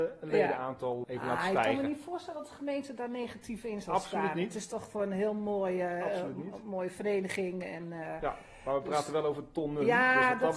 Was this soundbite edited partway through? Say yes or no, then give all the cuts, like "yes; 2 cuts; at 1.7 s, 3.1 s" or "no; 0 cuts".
yes; 1 cut; at 1.0 s